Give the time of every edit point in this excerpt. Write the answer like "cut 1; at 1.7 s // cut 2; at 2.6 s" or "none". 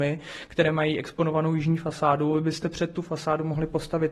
none